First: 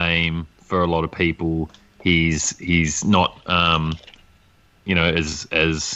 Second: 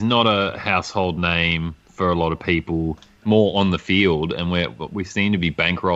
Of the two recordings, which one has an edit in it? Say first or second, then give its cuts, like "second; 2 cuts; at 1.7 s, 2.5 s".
second; 1 cut; at 3.2 s